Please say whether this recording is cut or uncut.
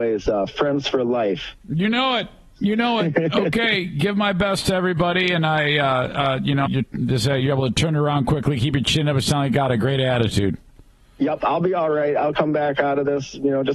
cut